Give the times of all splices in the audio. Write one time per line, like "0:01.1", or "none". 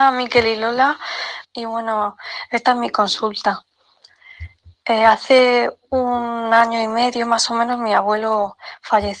0:01.4